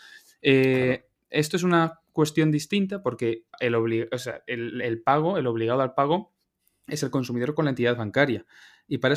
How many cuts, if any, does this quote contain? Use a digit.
0